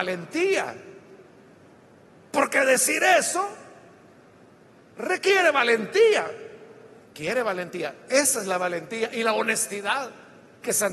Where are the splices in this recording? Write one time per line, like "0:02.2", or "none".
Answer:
0:07.0